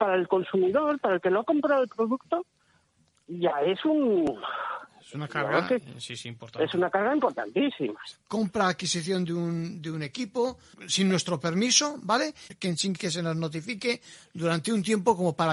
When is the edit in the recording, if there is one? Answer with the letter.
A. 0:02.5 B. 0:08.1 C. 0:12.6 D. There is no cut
B